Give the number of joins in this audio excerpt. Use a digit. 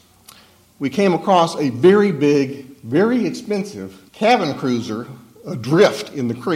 1